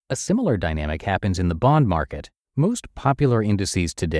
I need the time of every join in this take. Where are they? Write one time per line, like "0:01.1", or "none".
0:02.4